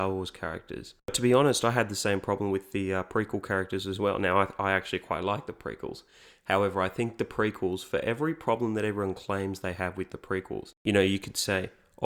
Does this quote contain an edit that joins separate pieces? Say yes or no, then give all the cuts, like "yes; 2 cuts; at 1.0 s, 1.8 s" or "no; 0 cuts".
no; 0 cuts